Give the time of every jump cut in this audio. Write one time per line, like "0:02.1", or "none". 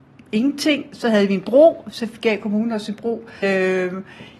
0:03.4